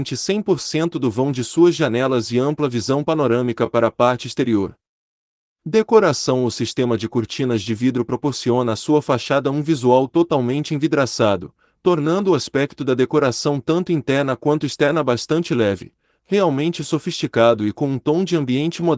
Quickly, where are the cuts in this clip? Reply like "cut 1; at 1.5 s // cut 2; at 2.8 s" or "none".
none

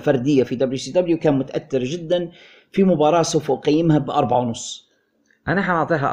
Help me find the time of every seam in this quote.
none

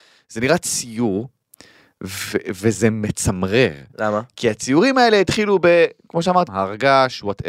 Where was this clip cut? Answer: cut 1; at 3.9 s // cut 2; at 6.5 s

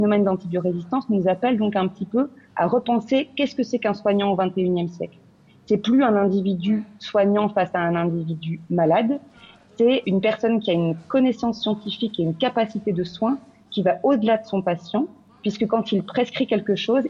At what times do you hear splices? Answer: cut 1; at 10.0 s

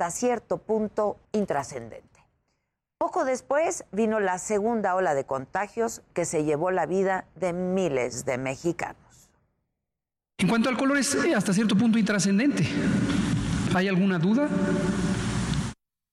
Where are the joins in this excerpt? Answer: cut 1; at 1.3 s // cut 2; at 13.7 s

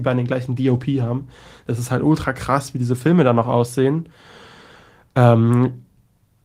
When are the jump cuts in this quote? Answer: none

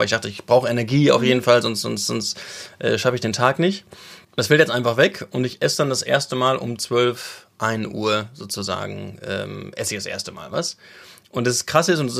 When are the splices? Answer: cut 1; at 4.2 s

